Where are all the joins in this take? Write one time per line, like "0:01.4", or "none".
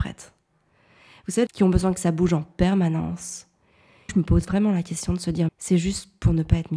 0:01.5
0:04.1
0:05.5